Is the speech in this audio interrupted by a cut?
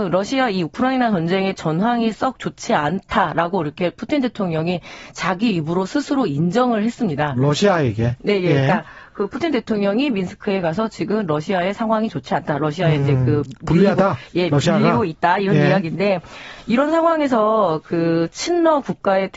no; 0 cuts

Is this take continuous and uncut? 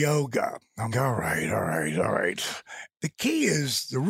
no; 2 cuts; at 0.9 s, 2.9 s

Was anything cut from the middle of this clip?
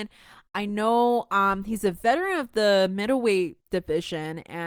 no; 0 cuts

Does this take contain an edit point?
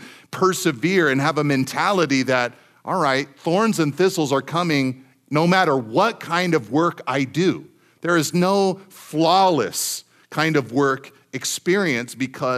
no; 0 cuts

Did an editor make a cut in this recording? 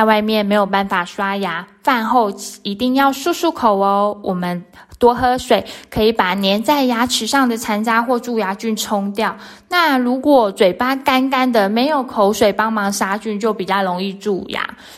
no; 0 cuts

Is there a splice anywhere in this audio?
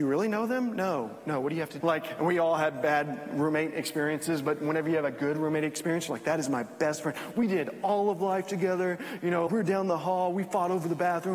yes; 2 cuts; at 1.8 s, 9.5 s

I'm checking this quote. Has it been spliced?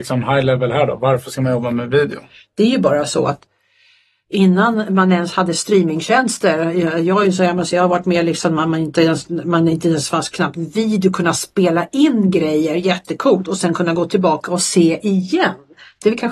yes; 1 cut; at 2.4 s

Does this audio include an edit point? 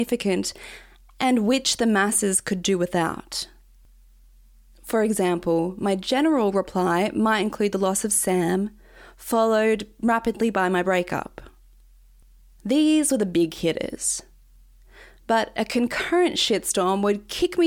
no; 0 cuts

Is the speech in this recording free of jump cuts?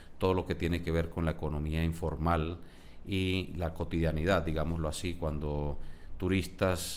yes; 0 cuts

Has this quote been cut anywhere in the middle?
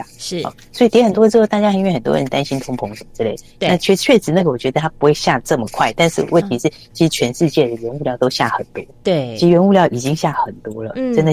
no; 0 cuts

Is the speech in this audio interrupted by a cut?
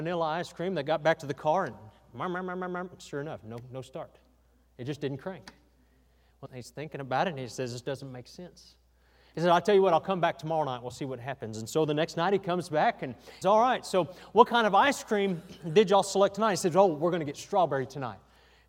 yes; 2 cuts; at 6.5 s, 13.4 s

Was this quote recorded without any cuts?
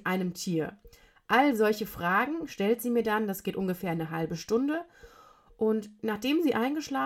yes; 0 cuts

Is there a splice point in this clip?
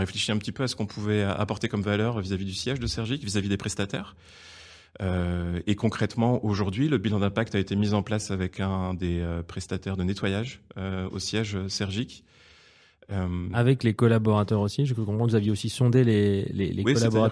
no; 0 cuts

